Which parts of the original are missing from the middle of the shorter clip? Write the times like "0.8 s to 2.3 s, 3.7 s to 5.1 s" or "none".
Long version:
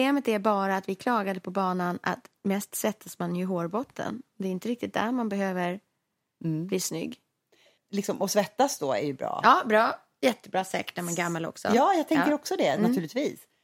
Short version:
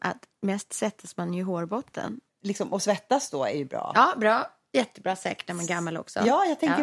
4.3 s to 7.8 s